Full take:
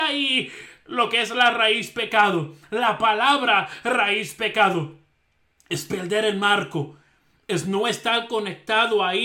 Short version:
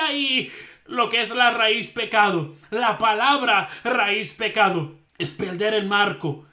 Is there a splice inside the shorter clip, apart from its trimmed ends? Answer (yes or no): yes